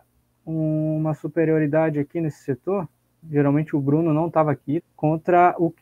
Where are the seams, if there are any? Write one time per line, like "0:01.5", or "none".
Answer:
0:03.2
0:04.8